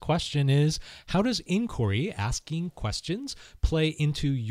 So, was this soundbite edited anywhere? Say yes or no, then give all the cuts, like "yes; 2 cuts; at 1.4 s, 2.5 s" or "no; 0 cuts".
no; 0 cuts